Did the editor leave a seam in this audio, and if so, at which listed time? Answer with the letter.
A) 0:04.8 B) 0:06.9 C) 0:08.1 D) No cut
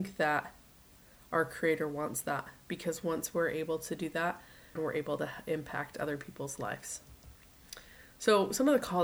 A